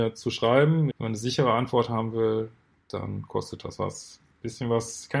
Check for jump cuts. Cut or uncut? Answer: cut